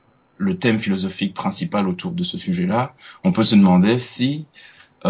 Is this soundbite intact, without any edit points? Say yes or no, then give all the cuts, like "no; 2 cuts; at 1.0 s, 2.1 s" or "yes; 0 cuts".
no; 1 cut; at 2.1 s